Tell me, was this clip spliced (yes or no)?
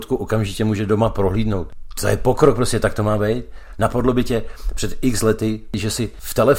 no